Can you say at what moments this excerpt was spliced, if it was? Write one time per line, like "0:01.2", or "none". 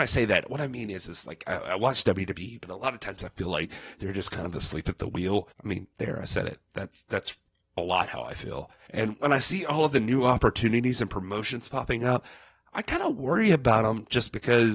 0:08.8